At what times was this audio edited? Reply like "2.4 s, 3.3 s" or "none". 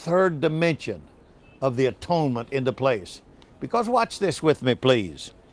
none